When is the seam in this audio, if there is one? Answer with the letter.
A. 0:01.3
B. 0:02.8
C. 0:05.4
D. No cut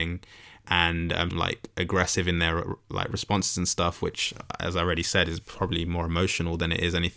A